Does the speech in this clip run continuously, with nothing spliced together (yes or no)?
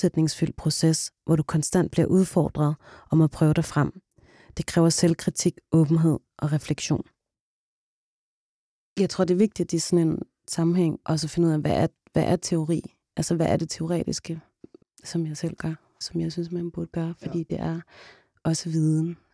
no